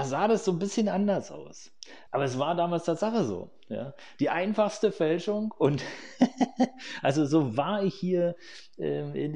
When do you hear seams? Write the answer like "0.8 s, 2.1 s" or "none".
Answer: 2.1 s